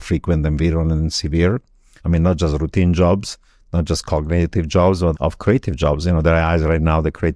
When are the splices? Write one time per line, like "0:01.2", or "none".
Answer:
0:02.0
0:05.1